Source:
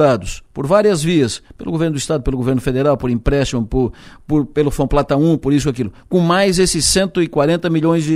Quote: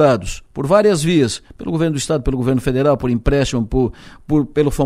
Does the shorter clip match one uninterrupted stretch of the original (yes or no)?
yes